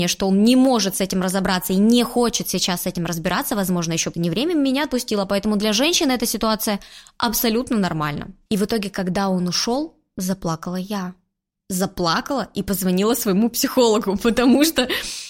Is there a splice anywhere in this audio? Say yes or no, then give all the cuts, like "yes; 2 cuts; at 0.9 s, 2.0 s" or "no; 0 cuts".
yes; 2 cuts; at 4.1 s, 8.5 s